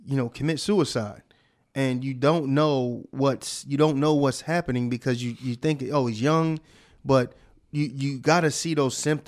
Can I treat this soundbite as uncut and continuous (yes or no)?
yes